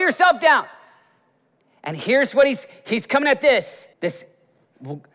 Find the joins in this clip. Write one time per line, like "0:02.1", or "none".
0:03.9